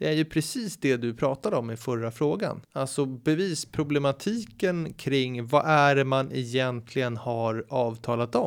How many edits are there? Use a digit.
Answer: 1